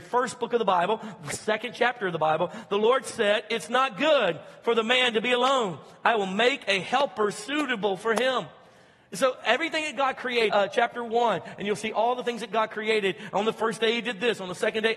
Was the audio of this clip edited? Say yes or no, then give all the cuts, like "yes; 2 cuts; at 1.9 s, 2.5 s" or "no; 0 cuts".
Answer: yes; 1 cut; at 10.5 s